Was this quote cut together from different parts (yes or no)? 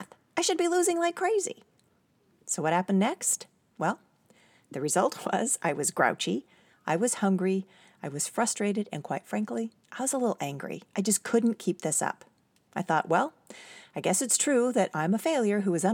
yes